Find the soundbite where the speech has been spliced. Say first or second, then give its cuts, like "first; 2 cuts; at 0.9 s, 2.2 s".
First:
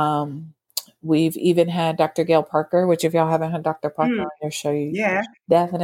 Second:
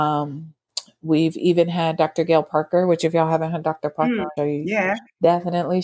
second; 1 cut; at 4.4 s